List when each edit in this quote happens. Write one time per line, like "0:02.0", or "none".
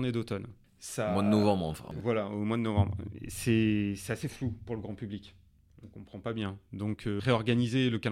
none